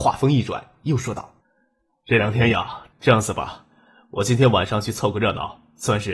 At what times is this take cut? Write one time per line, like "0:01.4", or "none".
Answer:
0:01.4
0:02.9